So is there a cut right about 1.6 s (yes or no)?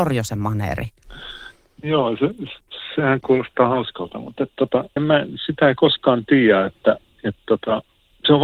no